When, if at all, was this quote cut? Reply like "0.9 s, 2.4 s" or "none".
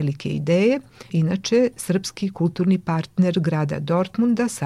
1.1 s